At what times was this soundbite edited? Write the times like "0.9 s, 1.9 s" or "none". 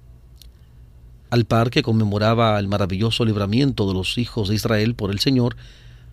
1.3 s